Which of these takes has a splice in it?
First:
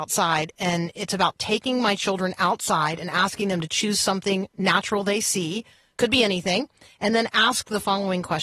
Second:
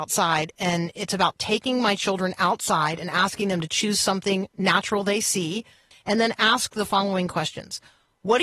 second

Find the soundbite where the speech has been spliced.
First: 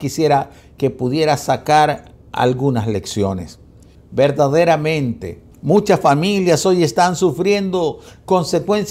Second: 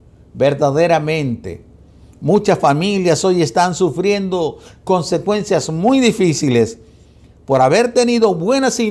first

